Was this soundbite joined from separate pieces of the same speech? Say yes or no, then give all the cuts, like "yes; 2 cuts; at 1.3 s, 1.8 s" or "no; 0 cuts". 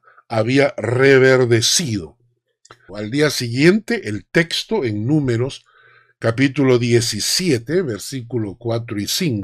yes; 1 cut; at 2.9 s